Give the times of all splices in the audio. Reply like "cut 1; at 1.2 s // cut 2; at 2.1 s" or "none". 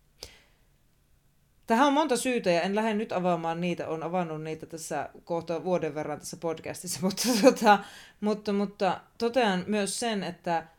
none